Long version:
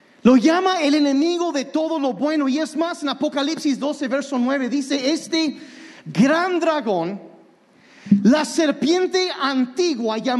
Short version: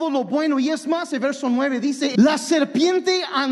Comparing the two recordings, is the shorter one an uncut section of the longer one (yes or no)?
no